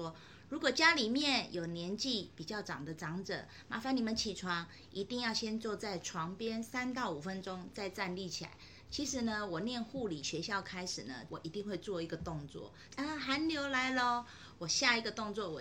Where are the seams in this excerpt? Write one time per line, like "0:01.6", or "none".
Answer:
0:08.9
0:11.3
0:12.9